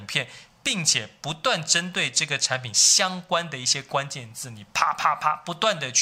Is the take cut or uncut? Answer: uncut